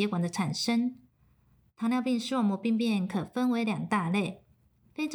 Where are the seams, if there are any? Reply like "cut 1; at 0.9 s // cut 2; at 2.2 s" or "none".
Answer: none